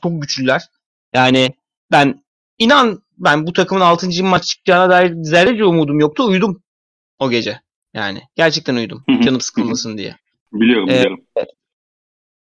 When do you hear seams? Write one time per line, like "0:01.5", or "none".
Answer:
none